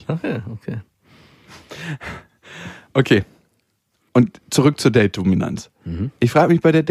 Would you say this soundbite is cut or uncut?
uncut